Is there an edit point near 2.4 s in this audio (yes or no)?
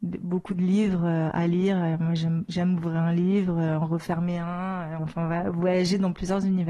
no